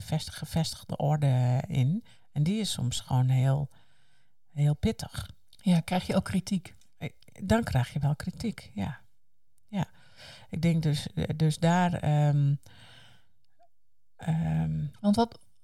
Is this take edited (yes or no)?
no